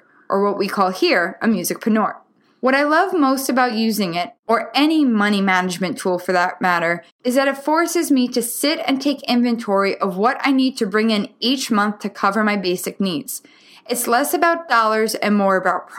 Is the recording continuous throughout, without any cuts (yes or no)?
yes